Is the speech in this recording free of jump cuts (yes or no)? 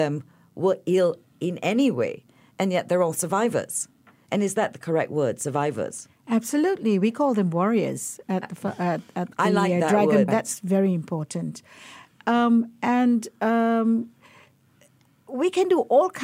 no